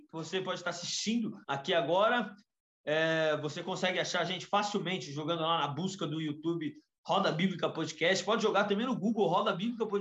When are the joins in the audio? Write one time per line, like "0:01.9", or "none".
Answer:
0:01.4